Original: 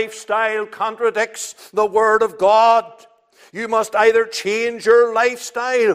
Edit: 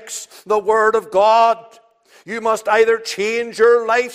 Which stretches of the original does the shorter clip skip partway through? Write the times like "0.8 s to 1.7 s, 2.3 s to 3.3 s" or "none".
none